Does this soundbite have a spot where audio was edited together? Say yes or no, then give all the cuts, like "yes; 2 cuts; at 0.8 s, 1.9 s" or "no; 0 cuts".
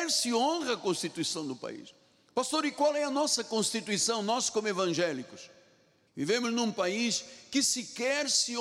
yes; 1 cut; at 6.1 s